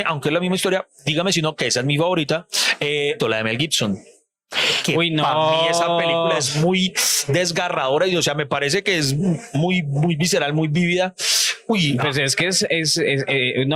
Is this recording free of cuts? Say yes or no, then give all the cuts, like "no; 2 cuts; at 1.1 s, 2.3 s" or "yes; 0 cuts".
no; 1 cut; at 3.2 s